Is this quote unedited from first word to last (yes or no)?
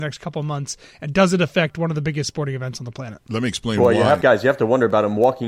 yes